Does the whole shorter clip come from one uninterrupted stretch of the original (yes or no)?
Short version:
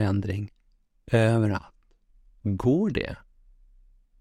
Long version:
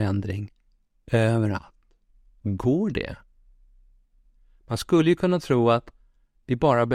yes